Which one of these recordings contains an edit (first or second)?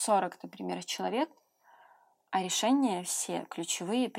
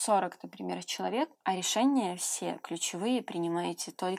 second